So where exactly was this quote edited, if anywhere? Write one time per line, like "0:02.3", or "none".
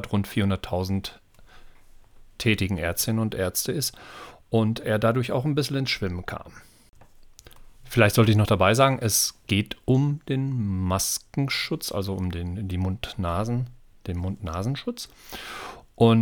none